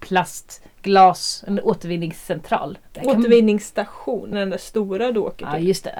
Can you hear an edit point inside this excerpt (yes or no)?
yes